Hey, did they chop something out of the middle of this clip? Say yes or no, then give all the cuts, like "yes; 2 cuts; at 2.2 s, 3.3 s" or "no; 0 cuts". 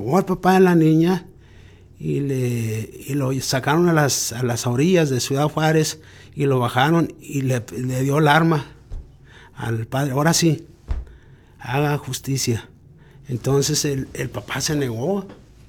no; 0 cuts